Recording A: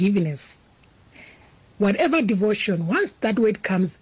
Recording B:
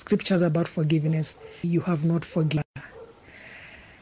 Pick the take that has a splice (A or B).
B